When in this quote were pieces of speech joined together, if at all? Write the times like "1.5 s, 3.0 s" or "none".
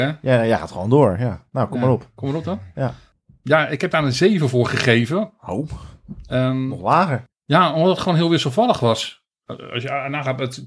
none

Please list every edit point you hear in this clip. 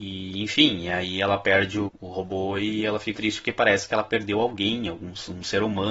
1.9 s, 3.1 s

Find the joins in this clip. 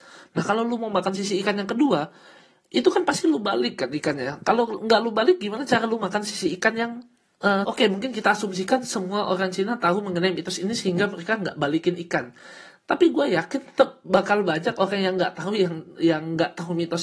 7.6 s

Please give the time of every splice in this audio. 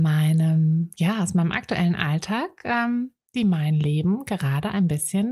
none

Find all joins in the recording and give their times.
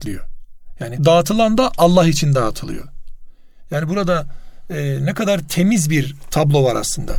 1.0 s

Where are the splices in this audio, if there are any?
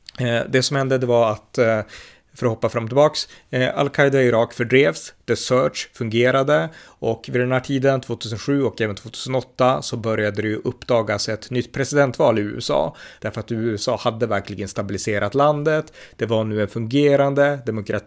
13.2 s

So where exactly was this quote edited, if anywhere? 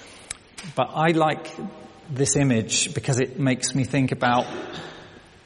none

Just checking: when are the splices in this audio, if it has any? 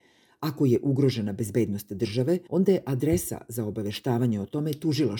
2.5 s

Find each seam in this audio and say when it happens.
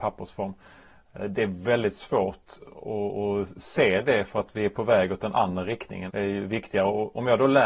6.1 s

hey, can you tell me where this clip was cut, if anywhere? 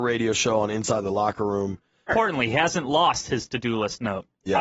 2.1 s

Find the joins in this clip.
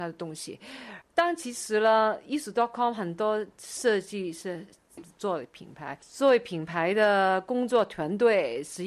1.0 s, 5.0 s

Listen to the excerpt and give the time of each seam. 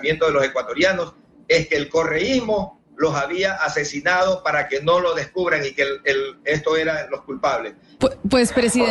8.0 s

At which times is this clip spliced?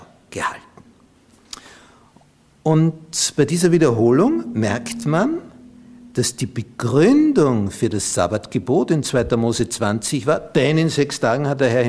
none

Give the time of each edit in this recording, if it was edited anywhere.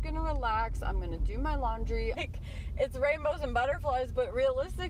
2.1 s

